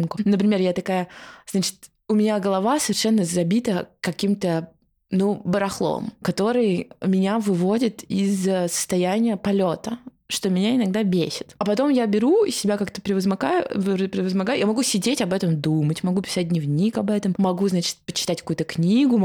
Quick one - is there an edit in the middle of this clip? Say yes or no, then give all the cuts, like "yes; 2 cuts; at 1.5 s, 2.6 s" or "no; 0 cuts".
no; 0 cuts